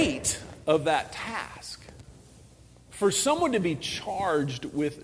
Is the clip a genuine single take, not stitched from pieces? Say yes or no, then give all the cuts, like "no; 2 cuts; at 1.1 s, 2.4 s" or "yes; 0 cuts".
yes; 0 cuts